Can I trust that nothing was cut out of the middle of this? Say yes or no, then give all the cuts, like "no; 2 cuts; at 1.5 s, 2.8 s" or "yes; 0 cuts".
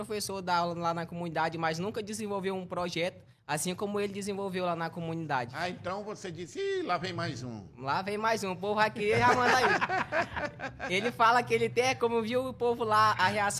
yes; 0 cuts